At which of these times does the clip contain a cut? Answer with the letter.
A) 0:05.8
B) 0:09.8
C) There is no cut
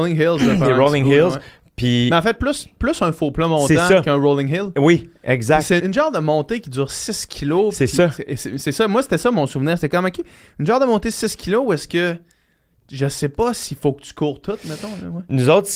A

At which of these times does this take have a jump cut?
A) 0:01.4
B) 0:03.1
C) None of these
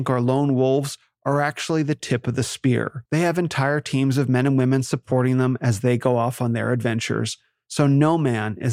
B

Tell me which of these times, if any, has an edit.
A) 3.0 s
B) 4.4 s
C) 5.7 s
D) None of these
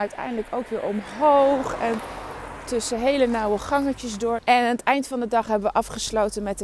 B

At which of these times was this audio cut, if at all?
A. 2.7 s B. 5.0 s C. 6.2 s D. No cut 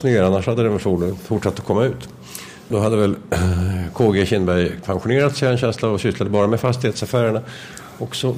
A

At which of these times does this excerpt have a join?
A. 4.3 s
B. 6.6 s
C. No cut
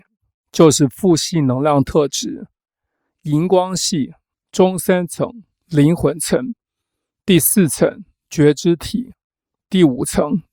A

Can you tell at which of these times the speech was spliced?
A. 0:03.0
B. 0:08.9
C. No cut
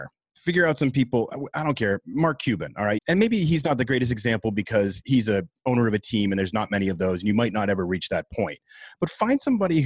A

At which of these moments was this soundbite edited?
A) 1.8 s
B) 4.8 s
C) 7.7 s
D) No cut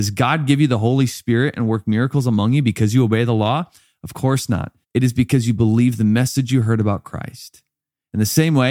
B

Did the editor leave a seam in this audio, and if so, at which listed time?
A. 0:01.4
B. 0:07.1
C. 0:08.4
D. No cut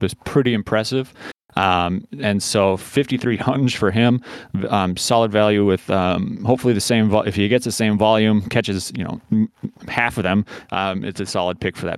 D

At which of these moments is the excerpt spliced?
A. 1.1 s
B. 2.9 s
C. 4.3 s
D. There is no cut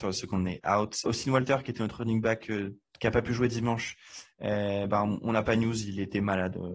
A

